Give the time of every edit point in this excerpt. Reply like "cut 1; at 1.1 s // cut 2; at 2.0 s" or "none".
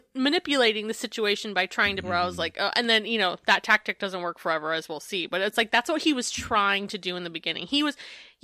cut 1; at 2.0 s